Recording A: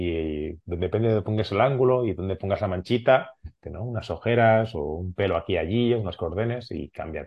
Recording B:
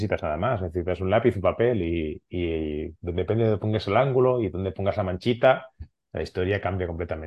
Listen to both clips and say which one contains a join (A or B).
A